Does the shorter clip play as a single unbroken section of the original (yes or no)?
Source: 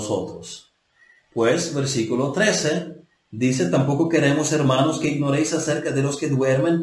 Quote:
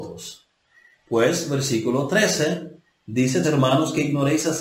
no